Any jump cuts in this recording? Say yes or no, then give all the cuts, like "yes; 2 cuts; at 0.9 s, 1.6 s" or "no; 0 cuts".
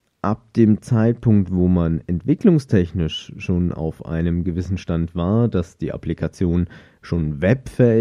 no; 0 cuts